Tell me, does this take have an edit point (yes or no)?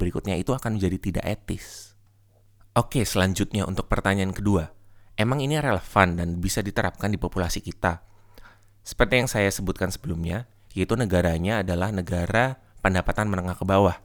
yes